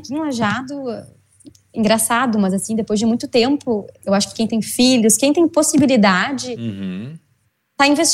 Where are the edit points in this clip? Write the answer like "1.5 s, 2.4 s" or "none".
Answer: 3.9 s